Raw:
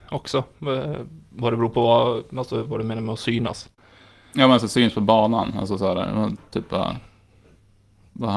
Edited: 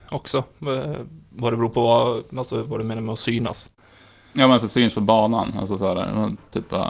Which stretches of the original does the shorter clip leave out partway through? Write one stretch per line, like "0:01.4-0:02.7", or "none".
none